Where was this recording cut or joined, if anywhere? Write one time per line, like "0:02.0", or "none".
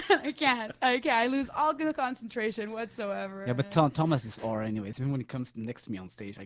none